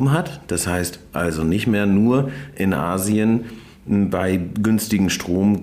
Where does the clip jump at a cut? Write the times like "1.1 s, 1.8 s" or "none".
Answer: none